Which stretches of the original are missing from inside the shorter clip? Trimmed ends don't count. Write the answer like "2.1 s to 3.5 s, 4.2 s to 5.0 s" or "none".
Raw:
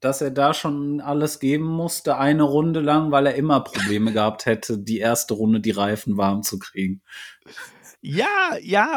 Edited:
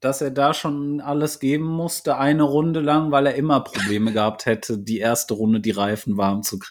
none